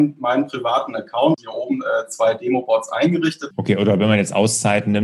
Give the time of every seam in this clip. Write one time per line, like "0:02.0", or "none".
0:03.5